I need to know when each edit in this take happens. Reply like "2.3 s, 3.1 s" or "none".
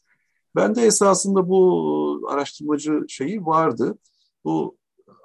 none